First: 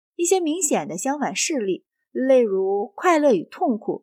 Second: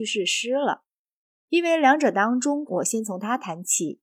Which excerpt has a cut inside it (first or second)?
second